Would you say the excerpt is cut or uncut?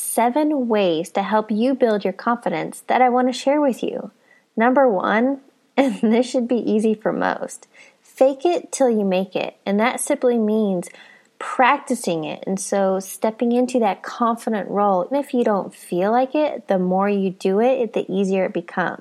cut